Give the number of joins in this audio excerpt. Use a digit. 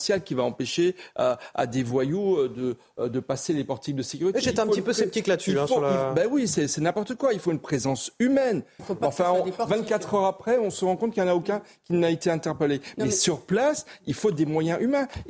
1